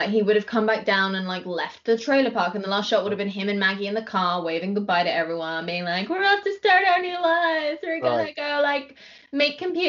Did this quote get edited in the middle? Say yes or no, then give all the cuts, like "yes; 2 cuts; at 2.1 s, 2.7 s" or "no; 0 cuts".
no; 0 cuts